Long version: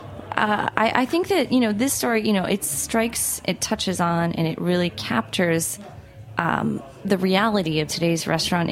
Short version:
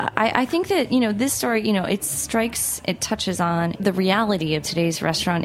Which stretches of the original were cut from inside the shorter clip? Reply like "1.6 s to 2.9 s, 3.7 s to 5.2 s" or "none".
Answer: 4.3 s to 7.0 s